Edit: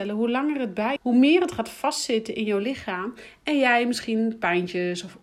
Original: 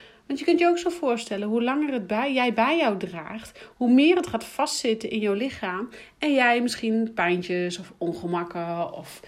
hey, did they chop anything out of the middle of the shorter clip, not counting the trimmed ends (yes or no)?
yes